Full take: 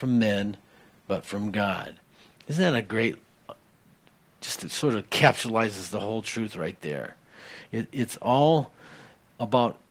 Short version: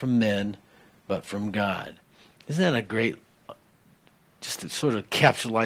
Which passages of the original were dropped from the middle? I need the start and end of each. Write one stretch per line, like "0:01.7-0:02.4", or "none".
none